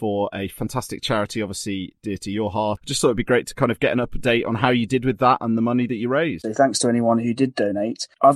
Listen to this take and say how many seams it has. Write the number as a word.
one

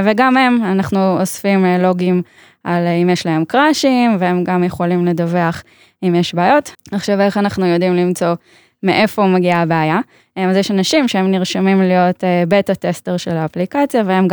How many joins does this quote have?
two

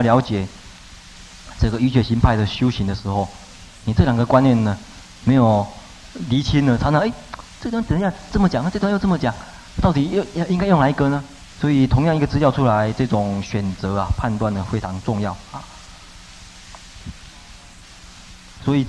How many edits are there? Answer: one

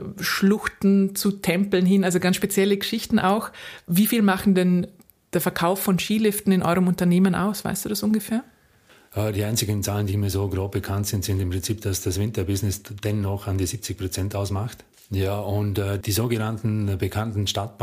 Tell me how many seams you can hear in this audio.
one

